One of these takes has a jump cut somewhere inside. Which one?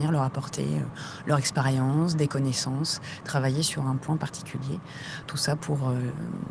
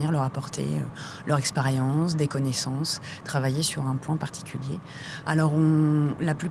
second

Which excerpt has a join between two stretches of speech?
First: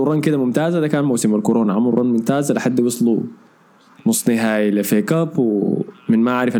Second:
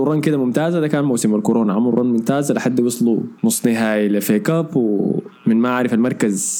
second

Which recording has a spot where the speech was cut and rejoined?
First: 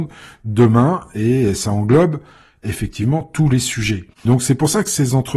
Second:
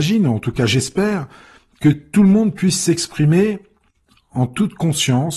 first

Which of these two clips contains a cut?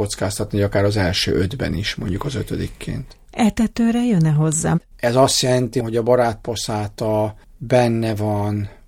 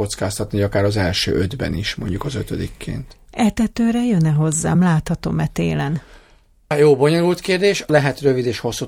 first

